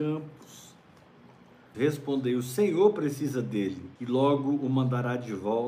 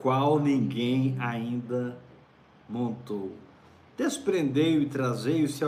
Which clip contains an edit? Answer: first; 2 cuts; at 1.7 s, 4.0 s

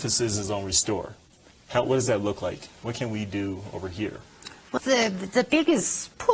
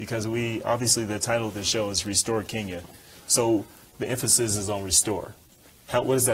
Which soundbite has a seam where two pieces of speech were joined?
first; 1 cut; at 4.8 s

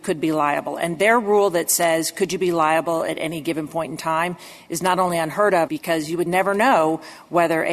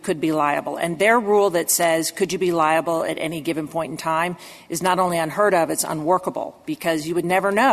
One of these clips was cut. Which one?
first; 1 cut; at 5.7 s

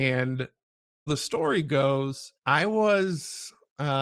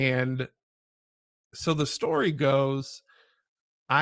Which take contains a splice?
first; 2 cuts; at 1.1 s, 2.4 s

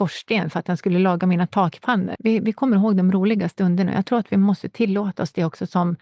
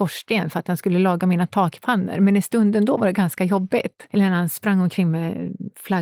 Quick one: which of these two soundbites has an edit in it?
first; 1 cut; at 2.1 s

